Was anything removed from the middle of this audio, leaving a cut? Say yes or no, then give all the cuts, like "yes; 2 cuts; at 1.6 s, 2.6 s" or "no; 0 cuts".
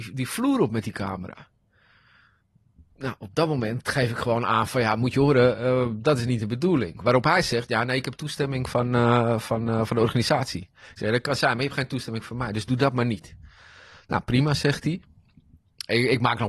no; 0 cuts